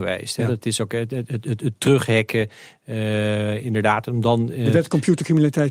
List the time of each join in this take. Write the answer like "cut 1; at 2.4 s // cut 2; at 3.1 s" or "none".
none